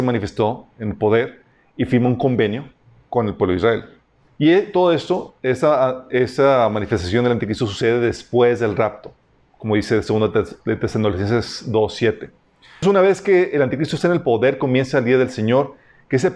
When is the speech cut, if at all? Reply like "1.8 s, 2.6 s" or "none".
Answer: 4.3 s, 12.8 s